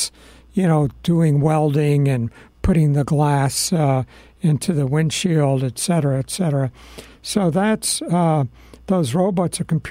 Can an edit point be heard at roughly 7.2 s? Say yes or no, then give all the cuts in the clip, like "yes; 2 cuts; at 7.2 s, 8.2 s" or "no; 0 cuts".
no; 0 cuts